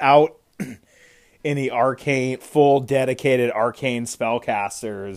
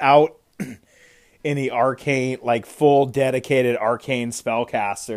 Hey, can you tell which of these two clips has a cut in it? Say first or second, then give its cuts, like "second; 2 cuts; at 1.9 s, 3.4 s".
first; 1 cut; at 2.4 s